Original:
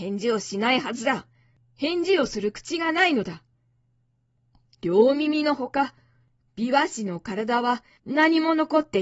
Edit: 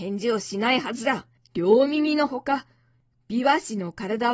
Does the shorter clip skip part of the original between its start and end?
yes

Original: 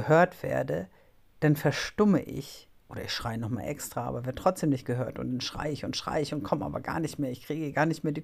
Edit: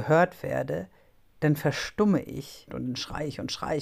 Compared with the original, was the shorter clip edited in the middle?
yes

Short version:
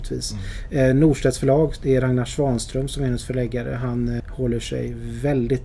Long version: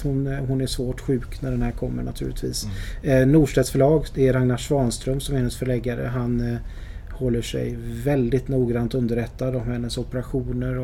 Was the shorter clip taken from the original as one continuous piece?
no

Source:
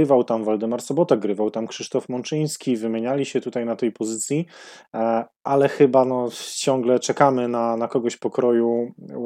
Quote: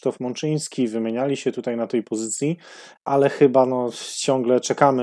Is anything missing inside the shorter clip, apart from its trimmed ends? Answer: yes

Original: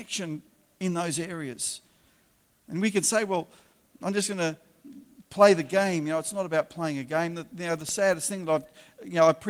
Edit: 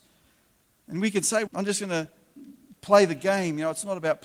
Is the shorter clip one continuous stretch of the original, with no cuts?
no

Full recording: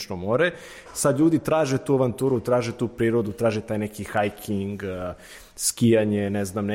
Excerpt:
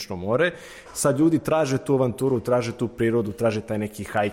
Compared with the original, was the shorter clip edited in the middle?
no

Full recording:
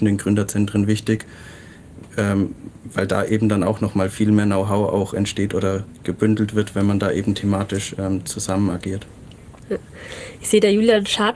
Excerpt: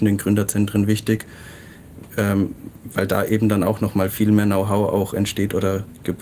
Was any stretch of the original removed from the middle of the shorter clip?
no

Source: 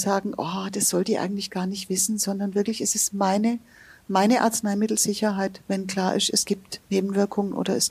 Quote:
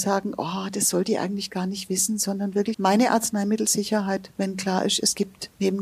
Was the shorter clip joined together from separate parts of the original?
yes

